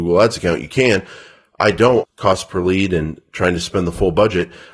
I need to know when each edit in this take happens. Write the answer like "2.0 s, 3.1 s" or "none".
2.0 s